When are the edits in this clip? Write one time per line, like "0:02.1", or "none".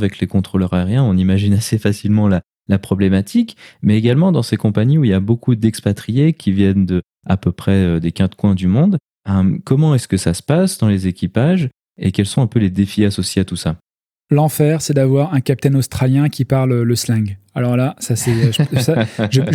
none